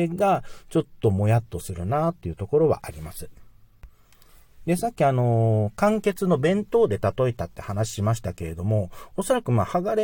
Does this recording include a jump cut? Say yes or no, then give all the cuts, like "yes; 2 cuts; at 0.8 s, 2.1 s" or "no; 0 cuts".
no; 0 cuts